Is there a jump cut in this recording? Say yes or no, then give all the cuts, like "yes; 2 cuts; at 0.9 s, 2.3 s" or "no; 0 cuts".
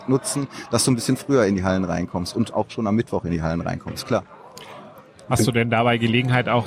no; 0 cuts